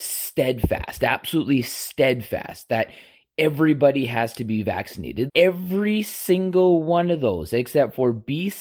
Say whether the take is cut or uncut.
cut